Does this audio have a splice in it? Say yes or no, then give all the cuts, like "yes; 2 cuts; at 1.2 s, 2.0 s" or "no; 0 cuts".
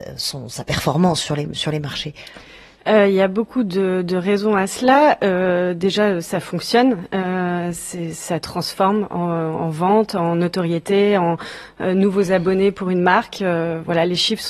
no; 0 cuts